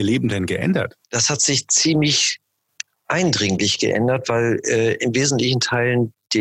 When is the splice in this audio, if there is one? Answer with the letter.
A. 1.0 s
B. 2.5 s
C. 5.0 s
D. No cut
A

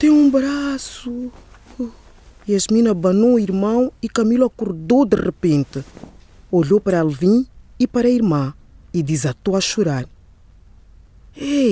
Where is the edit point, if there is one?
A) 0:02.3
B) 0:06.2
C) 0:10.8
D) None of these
D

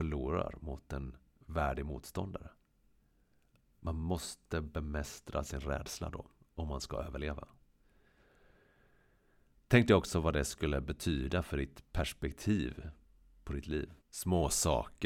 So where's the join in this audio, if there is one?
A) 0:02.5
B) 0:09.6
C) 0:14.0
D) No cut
C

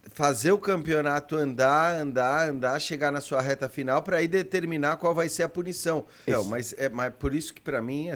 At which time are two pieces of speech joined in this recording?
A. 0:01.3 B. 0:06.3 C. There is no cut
B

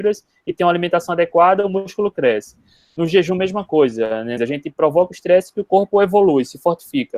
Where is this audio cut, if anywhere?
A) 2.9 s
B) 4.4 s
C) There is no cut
B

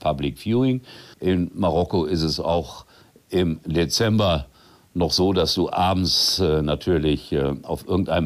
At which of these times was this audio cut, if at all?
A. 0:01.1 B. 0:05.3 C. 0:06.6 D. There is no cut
A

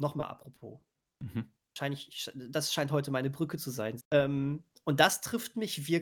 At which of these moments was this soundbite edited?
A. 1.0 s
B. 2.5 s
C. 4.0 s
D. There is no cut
C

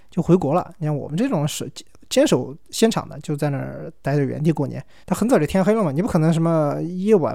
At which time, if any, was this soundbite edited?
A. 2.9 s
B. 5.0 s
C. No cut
B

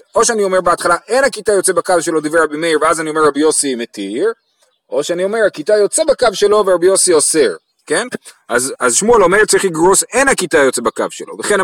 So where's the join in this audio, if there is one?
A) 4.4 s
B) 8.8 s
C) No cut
B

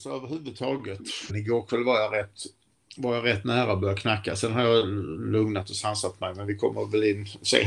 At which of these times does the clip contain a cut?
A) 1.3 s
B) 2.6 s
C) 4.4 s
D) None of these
A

